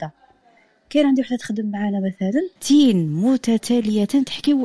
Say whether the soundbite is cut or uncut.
cut